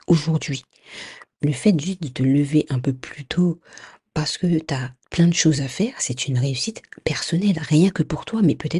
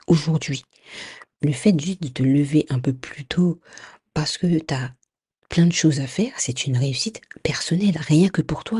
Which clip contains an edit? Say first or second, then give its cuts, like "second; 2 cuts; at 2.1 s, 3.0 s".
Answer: first; 1 cut; at 5.0 s